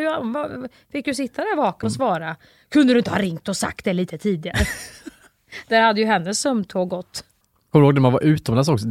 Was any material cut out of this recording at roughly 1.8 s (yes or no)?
yes